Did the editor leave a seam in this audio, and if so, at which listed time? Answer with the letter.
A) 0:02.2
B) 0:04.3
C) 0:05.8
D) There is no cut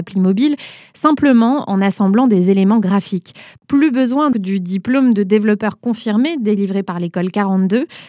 B